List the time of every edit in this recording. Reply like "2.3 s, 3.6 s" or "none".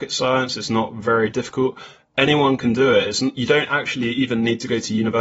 none